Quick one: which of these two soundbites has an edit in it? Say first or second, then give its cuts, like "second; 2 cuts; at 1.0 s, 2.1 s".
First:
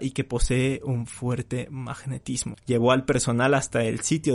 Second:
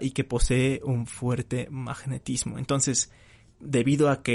first; 1 cut; at 2.5 s